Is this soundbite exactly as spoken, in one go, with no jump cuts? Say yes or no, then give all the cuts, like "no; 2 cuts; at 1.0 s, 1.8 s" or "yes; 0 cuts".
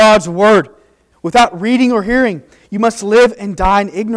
no; 1 cut; at 1.1 s